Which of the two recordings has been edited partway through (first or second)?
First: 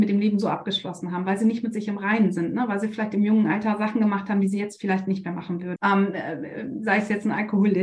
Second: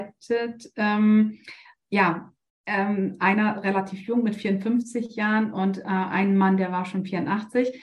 first